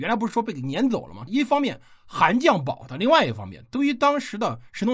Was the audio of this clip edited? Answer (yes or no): yes